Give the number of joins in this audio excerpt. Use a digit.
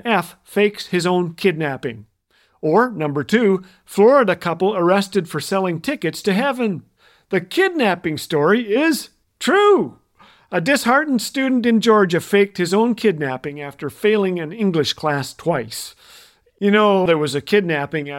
1